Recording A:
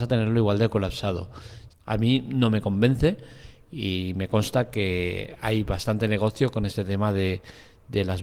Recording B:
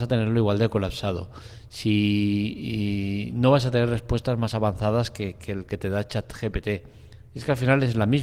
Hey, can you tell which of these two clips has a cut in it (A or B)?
A